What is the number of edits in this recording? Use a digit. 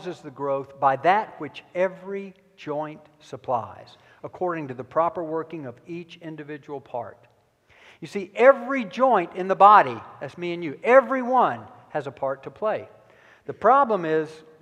0